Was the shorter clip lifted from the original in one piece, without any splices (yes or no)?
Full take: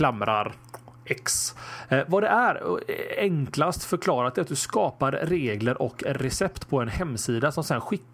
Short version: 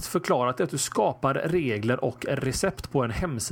yes